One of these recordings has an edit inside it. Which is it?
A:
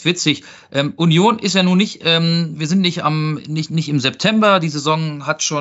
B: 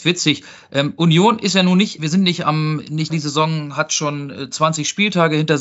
B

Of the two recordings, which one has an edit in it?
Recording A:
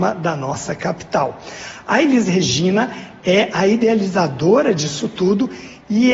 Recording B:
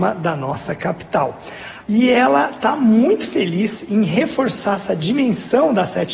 B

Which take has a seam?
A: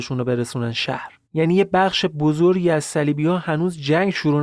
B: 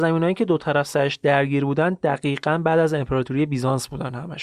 A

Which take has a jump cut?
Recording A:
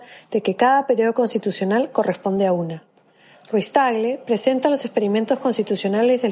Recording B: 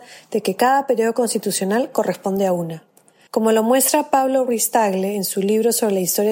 B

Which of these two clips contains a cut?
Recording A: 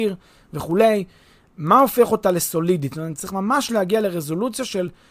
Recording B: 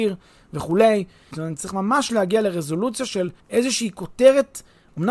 B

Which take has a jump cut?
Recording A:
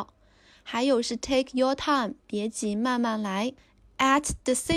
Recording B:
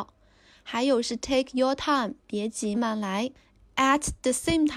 B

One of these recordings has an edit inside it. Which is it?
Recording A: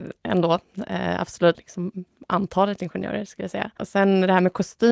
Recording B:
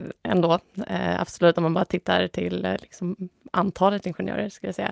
A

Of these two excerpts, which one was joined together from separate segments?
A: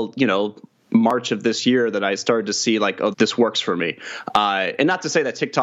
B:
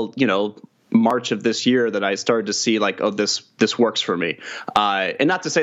A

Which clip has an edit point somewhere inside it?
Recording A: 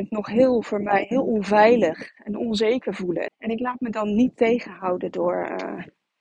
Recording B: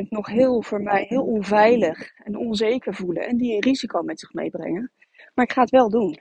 A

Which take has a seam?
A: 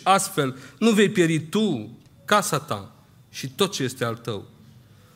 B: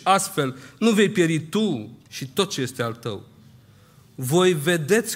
B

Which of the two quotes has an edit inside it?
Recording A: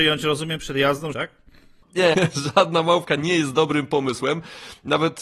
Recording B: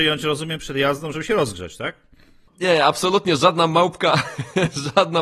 A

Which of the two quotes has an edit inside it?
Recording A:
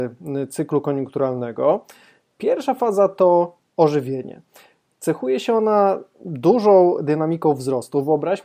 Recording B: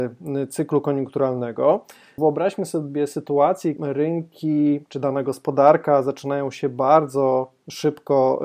B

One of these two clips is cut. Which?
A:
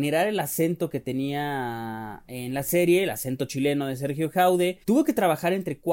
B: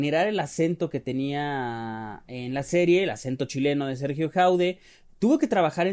A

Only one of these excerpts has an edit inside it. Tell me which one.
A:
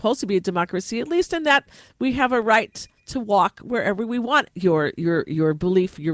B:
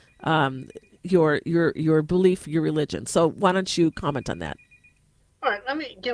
A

